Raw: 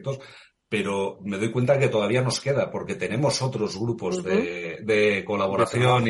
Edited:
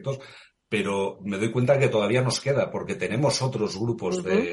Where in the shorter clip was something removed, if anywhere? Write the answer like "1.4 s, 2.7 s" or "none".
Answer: none